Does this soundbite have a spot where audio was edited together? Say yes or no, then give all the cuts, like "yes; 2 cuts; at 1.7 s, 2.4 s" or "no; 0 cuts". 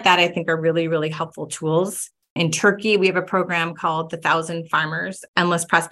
no; 0 cuts